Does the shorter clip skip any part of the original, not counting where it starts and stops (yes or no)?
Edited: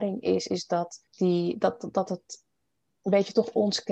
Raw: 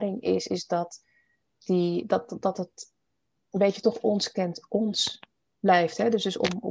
yes